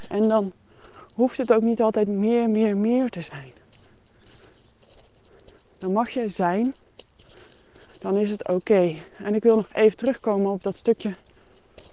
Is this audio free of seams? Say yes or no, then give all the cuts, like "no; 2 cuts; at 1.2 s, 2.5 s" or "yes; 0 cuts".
yes; 0 cuts